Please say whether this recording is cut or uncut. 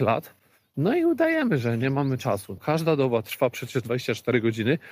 cut